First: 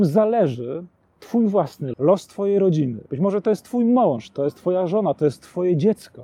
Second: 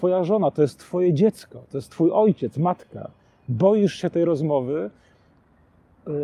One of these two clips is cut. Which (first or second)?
first